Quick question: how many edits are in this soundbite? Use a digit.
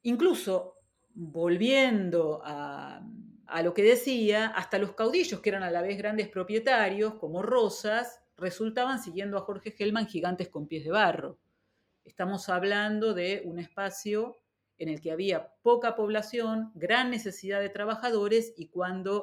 2